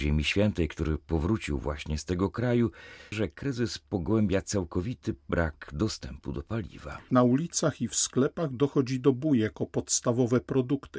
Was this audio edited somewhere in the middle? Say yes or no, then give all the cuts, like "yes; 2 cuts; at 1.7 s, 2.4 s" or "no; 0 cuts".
yes; 2 cuts; at 3.1 s, 7.1 s